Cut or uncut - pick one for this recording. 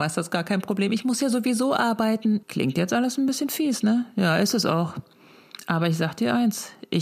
cut